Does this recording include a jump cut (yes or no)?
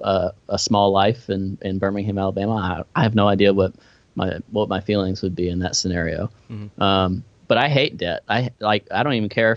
no